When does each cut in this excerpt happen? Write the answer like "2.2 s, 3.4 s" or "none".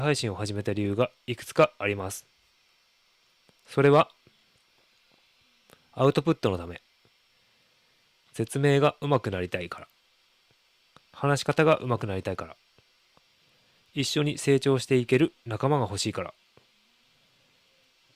none